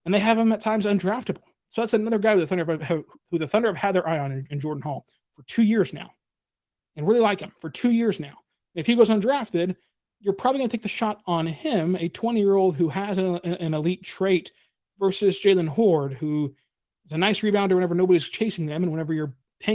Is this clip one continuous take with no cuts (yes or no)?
yes